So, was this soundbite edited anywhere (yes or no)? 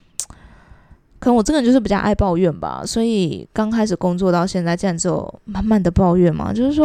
no